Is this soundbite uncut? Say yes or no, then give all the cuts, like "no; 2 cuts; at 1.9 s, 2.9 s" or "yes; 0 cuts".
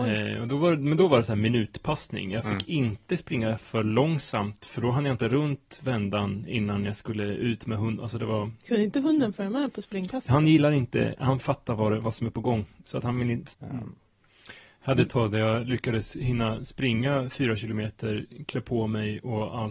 no; 1 cut; at 13.5 s